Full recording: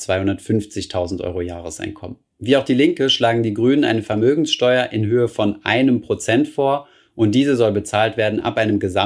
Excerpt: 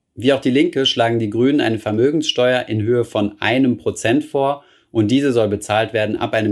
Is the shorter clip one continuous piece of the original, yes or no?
yes